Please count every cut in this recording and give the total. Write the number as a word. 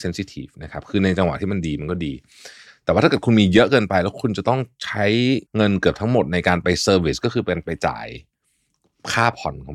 one